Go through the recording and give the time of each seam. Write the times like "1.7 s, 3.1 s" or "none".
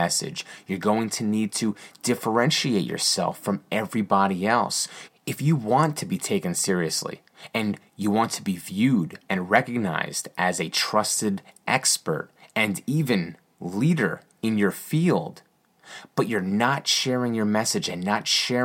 5.1 s